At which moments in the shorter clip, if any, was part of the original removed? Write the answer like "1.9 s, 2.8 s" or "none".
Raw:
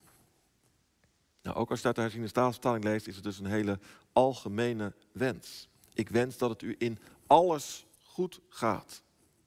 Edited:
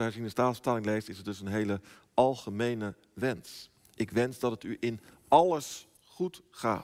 none